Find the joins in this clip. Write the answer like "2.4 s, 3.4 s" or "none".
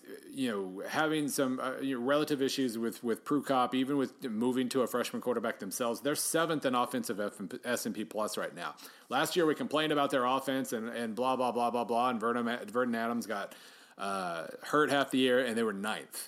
none